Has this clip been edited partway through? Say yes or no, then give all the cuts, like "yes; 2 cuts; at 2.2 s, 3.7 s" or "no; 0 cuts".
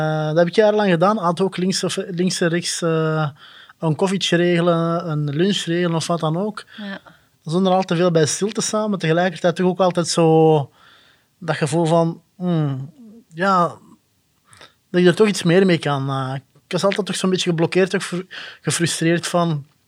no; 0 cuts